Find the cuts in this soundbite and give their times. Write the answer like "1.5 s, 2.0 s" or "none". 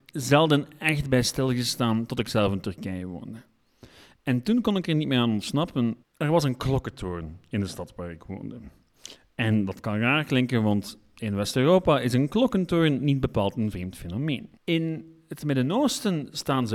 6.0 s, 14.6 s